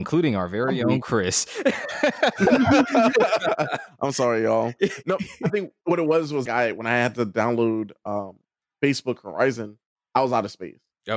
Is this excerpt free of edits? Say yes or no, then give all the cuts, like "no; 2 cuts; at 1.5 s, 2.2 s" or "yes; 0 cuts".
no; 1 cut; at 6.5 s